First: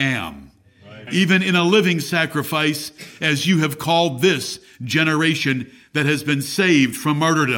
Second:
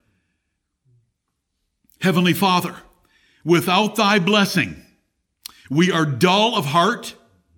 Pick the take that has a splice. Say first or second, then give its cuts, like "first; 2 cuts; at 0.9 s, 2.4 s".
first; 1 cut; at 1.1 s